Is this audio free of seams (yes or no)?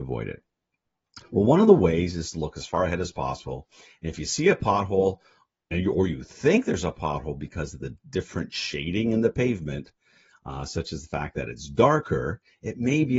yes